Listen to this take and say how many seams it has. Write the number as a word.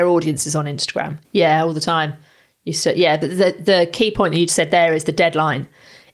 two